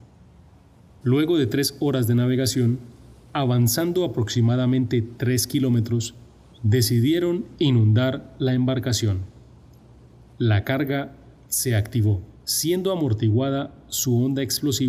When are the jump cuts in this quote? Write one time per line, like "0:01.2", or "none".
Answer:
0:01.0